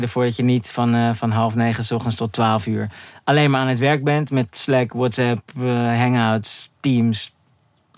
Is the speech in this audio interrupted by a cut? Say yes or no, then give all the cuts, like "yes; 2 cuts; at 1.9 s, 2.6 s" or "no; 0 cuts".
no; 0 cuts